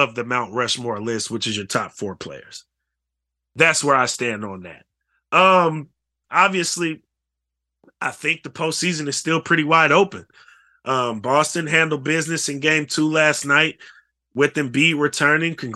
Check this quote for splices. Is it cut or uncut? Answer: cut